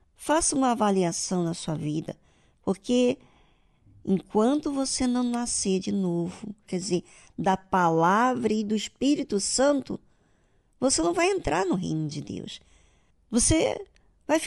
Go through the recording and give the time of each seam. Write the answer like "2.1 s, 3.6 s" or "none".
6.7 s